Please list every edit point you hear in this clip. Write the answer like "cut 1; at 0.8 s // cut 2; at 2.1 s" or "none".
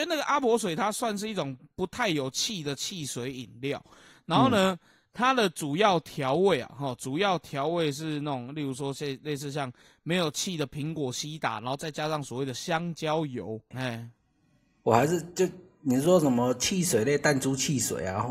cut 1; at 13.7 s

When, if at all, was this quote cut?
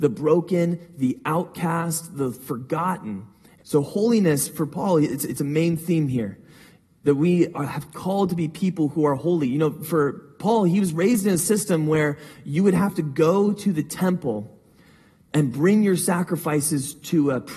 cut 1; at 3.6 s

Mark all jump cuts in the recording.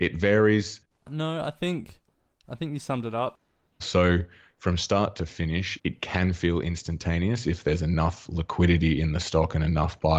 cut 1; at 0.9 s // cut 2; at 3.8 s // cut 3; at 5.8 s

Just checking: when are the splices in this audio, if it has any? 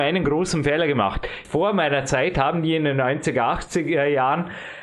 cut 1; at 1.4 s

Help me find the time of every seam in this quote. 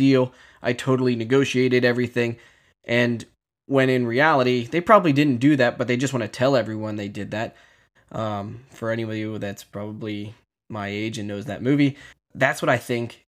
cut 1; at 8.0 s

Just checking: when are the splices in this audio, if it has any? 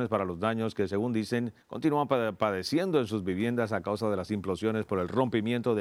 cut 1; at 1.6 s

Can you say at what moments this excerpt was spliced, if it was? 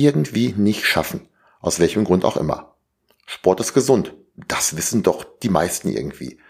none

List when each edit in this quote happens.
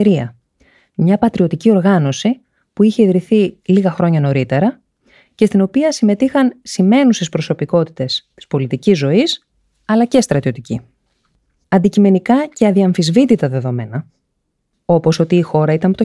cut 1; at 11.6 s

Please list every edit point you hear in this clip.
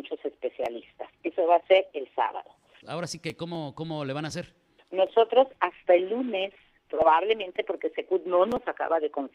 cut 1; at 2.8 s // cut 2; at 4.8 s

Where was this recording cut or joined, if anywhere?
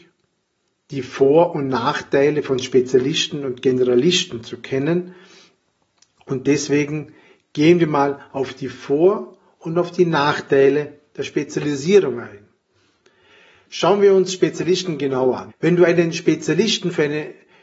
cut 1; at 15.5 s

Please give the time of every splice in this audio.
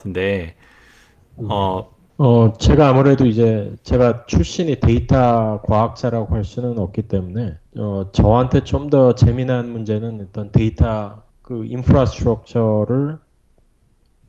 cut 1; at 2.1 s // cut 2; at 7.7 s // cut 3; at 11.3 s

